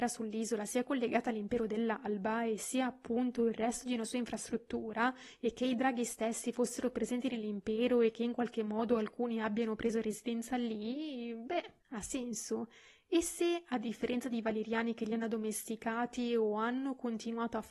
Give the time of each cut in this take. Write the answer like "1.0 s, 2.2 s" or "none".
11.8 s